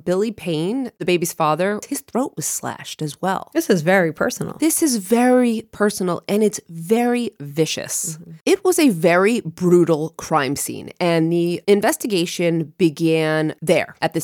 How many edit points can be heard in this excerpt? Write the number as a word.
zero